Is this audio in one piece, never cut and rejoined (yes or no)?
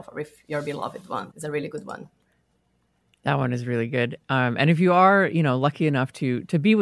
no